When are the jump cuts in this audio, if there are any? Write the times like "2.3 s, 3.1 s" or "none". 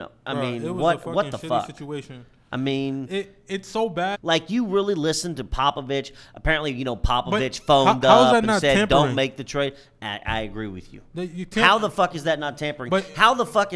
4.1 s